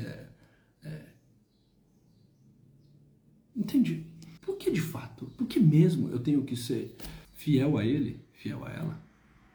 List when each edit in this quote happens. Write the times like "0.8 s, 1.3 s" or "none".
4.4 s, 7.2 s